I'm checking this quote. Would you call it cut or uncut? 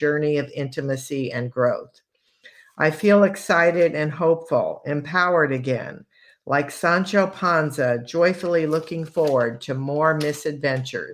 uncut